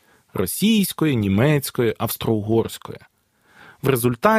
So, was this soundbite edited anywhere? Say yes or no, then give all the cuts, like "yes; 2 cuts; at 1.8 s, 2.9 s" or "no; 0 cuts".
no; 0 cuts